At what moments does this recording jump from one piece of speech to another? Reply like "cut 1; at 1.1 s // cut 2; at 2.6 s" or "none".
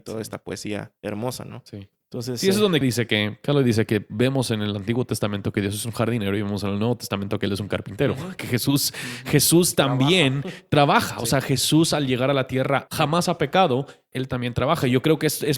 cut 1; at 2.8 s // cut 2; at 12.9 s // cut 3; at 14.1 s